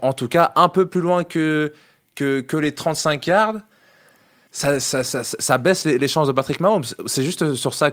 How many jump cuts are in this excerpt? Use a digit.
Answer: 1